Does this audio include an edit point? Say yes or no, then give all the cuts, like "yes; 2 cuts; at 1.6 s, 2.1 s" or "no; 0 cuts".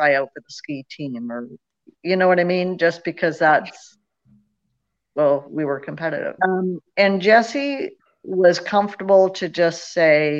yes; 1 cut; at 6.4 s